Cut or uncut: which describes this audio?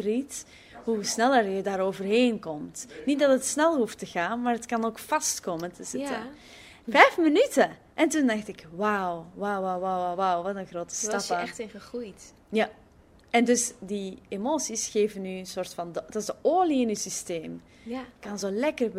cut